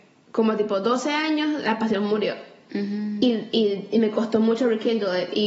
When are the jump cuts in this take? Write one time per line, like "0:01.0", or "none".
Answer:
none